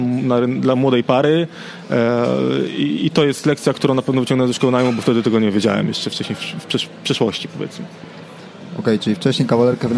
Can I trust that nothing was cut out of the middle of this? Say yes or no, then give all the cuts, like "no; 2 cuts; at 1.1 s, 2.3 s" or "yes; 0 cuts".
yes; 0 cuts